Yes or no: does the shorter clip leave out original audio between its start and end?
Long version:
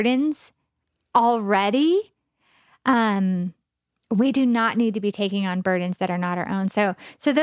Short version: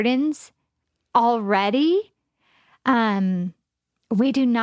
no